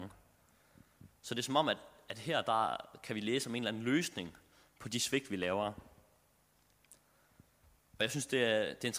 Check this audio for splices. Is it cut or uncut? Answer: uncut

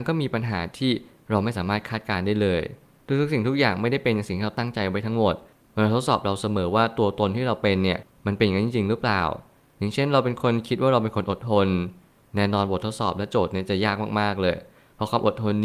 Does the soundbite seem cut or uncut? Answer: uncut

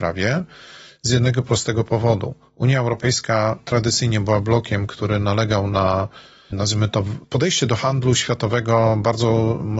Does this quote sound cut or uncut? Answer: uncut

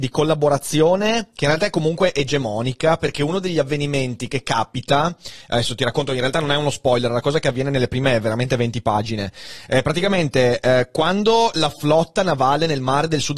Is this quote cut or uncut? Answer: uncut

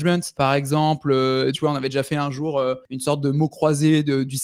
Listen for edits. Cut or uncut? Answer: cut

